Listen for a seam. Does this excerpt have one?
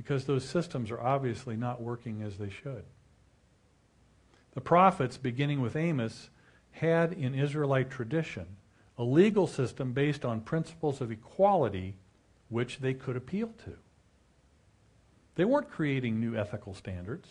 no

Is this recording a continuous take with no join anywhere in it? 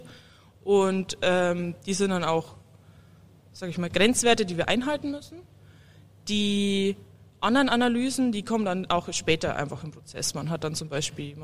yes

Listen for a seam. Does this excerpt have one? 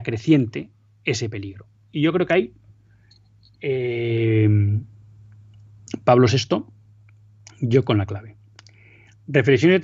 no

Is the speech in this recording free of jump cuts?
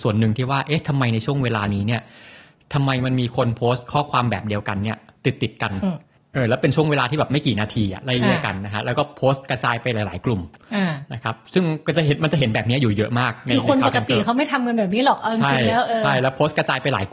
yes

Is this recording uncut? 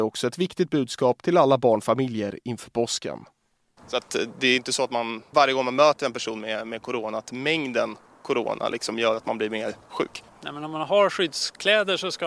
no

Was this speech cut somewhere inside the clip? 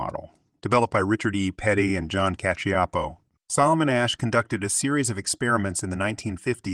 yes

